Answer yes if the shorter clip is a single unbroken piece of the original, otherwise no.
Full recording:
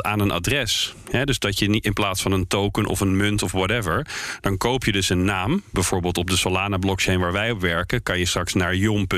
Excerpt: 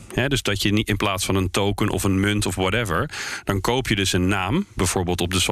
yes